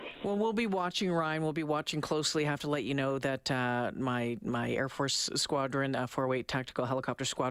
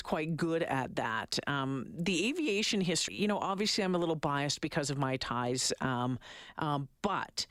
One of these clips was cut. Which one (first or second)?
second